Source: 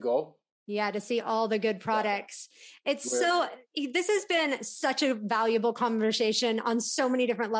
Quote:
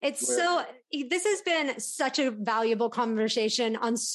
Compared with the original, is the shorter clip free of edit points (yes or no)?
yes